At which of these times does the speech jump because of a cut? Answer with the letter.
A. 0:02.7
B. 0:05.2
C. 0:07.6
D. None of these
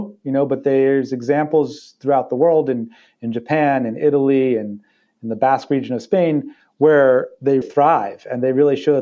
C